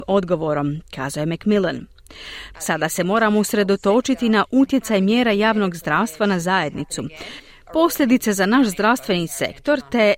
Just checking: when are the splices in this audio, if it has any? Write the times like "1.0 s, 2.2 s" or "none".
2.5 s